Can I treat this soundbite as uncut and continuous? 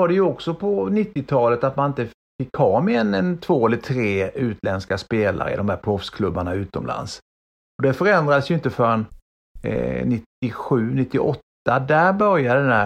yes; 0 cuts

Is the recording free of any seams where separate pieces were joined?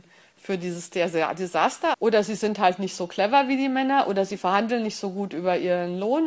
no; 1 cut; at 1.9 s

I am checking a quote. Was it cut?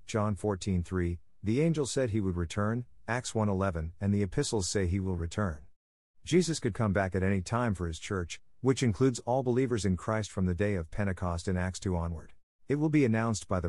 yes; 1 cut; at 12.5 s

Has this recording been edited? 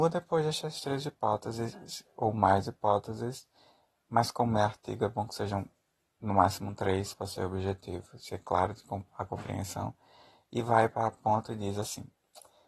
no; 0 cuts

